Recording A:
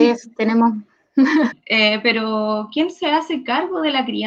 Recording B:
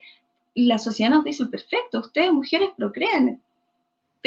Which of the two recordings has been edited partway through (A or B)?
A